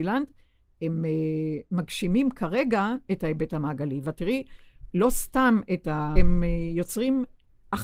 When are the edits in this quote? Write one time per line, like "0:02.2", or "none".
0:06.2